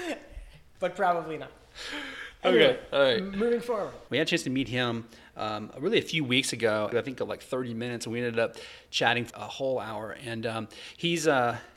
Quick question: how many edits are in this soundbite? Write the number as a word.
three